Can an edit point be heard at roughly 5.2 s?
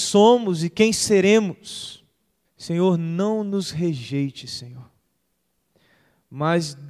no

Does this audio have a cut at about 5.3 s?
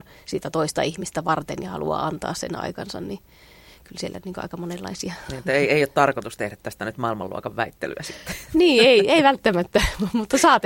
no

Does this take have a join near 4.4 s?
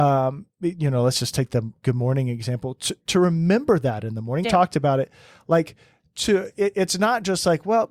yes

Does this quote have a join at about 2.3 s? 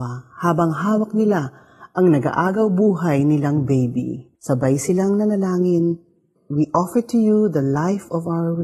no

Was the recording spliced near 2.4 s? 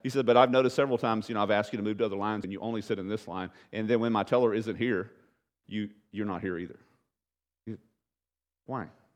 yes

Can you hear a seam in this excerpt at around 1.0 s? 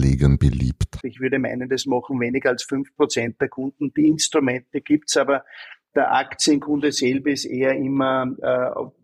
yes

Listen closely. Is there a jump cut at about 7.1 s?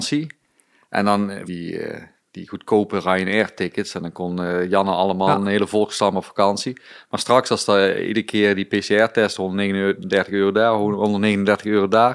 no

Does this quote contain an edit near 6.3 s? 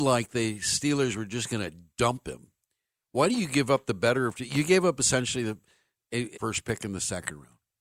yes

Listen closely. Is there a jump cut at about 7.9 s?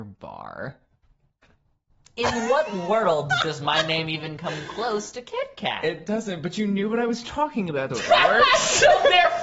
yes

